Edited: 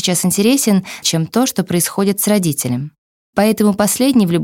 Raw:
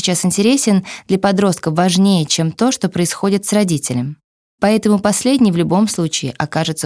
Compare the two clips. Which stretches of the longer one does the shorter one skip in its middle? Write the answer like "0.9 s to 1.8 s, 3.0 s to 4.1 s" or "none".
1.0 s to 2.3 s